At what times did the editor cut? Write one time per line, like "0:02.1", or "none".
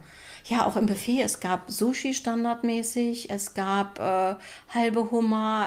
none